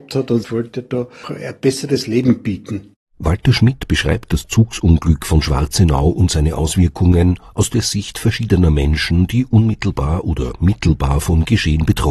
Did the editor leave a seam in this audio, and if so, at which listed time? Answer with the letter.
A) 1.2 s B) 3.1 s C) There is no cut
A